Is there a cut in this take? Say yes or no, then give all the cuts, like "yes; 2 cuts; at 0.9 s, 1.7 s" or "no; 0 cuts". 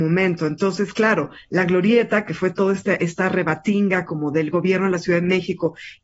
no; 0 cuts